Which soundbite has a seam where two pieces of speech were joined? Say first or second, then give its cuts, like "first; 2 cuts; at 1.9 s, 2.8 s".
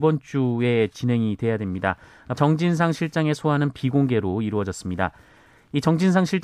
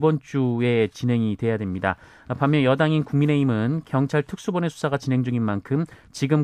first; 1 cut; at 2.4 s